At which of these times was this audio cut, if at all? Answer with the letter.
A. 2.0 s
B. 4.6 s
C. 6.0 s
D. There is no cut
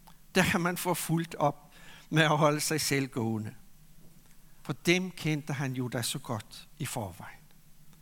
B